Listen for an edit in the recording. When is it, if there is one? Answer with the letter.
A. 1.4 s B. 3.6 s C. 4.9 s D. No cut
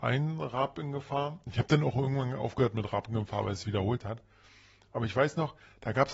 B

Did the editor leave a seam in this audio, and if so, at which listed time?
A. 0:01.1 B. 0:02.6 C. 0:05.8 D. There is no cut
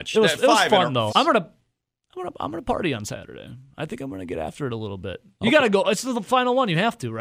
A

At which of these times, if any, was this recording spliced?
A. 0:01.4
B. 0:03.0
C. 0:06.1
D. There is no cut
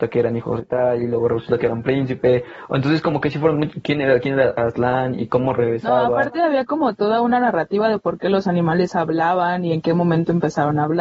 D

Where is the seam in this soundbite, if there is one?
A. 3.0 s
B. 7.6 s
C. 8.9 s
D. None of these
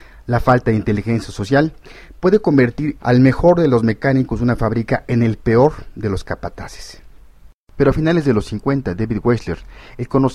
A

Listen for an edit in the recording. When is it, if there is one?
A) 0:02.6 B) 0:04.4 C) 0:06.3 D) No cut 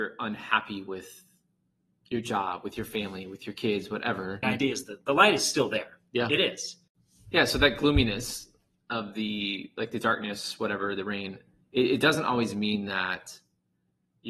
B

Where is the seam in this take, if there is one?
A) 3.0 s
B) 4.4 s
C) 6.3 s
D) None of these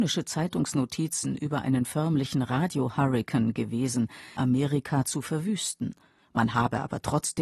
B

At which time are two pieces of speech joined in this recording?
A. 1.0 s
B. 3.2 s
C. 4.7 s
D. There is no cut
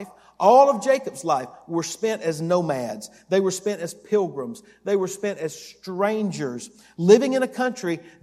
D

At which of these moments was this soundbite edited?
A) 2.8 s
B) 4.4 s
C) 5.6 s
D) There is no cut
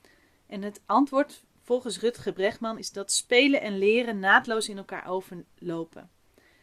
A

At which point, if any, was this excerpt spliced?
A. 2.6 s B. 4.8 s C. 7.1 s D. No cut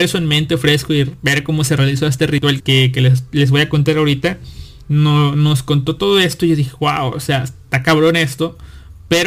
A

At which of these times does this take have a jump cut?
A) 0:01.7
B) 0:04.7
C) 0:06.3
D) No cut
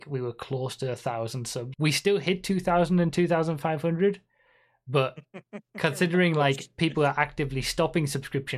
A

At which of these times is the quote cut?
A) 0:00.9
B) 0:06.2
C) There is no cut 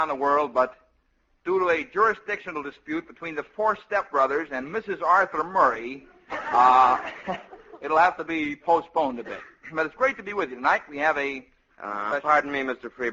C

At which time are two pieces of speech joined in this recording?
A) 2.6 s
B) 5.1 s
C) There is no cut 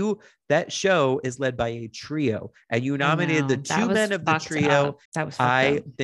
B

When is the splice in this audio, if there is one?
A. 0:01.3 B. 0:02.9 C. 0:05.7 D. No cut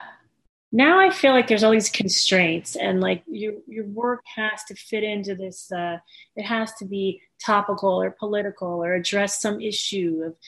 D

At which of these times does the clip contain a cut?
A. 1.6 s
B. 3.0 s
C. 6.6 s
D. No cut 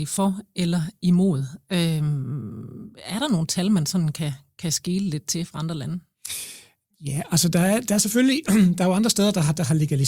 D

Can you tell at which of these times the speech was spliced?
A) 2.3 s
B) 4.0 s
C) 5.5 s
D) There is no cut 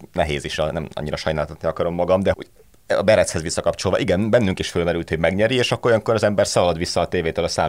A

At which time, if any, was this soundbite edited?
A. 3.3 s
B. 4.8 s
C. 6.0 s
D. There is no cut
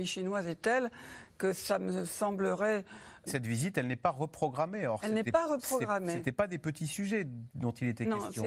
A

